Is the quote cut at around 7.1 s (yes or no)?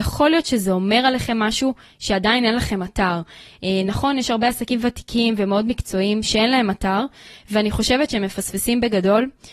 no